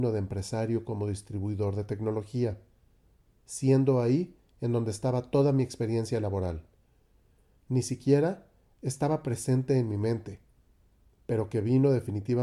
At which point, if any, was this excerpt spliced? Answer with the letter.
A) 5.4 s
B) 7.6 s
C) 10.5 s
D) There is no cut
B